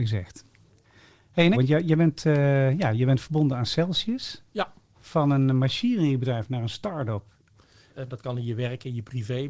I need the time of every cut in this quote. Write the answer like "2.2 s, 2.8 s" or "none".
1.5 s, 7.9 s